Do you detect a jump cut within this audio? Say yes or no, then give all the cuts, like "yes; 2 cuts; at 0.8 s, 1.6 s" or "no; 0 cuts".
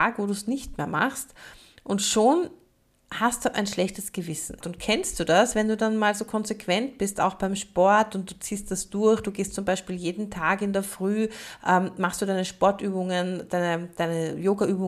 yes; 1 cut; at 4.6 s